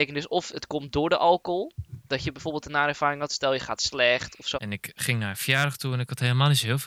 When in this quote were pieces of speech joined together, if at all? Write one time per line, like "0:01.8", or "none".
0:04.5